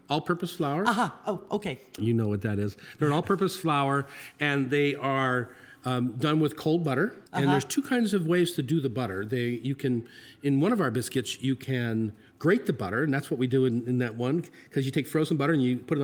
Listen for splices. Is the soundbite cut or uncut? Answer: cut